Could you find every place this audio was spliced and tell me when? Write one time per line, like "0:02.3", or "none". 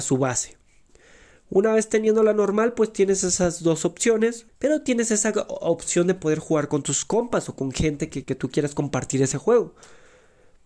0:04.5
0:08.2